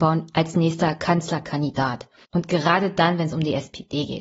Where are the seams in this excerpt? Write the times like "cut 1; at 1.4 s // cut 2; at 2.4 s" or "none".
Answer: cut 1; at 2.2 s